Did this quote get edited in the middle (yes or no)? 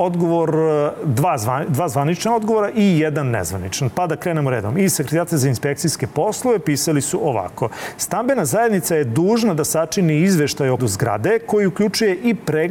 yes